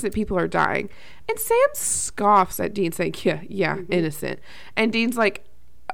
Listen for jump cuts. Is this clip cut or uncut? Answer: uncut